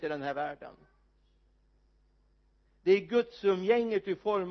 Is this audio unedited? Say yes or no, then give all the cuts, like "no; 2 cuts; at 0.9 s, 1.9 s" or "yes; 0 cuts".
yes; 0 cuts